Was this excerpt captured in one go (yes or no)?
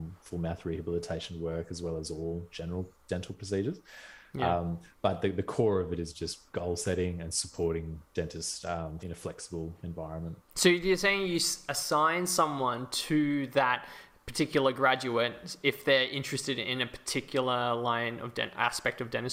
no